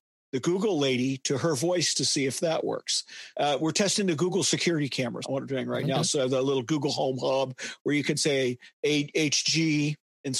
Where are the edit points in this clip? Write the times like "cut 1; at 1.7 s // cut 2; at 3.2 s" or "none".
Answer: cut 1; at 3.3 s // cut 2; at 5.2 s // cut 3; at 8.7 s